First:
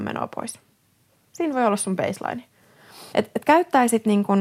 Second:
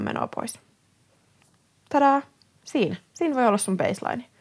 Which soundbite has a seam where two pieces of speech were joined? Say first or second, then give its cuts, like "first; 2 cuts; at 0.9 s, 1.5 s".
first; 2 cuts; at 1.3 s, 3.1 s